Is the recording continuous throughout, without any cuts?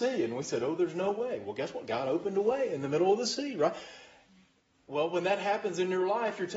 yes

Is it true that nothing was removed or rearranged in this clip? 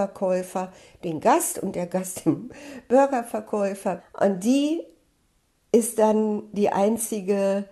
no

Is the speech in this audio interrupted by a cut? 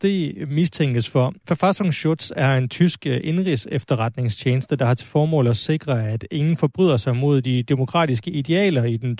yes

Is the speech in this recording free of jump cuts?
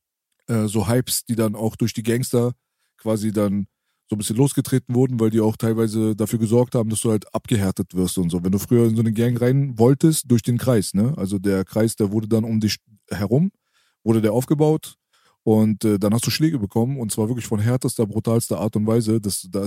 no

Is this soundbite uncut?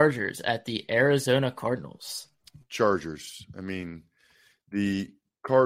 yes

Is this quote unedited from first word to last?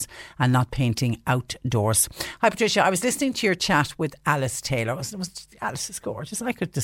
yes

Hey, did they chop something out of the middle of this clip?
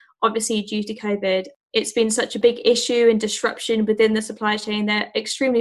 no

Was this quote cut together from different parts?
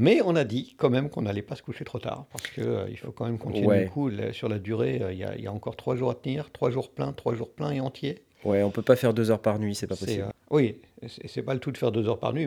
yes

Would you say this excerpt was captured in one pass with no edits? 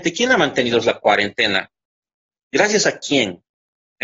yes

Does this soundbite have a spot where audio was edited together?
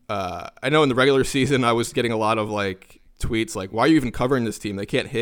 no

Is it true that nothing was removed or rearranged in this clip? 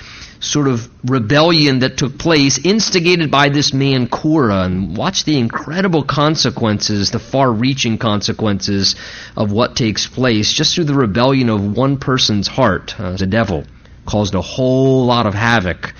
no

